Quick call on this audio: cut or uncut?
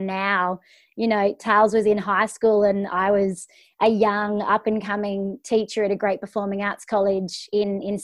uncut